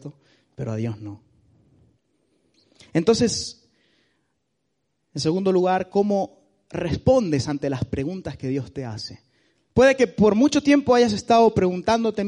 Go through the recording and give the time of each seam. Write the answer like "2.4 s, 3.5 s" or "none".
none